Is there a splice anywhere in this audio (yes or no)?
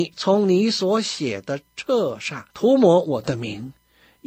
yes